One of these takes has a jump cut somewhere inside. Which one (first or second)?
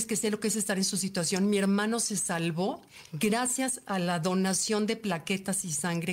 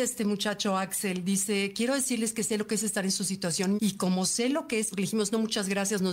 second